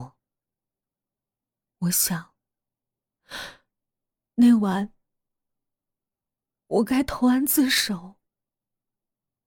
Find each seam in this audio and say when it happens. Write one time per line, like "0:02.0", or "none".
none